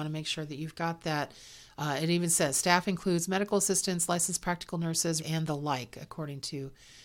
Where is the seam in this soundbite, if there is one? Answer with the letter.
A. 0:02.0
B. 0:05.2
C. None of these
B